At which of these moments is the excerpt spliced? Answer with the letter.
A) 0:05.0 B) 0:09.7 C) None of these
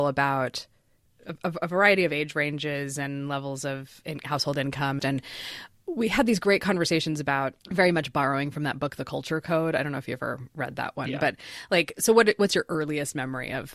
A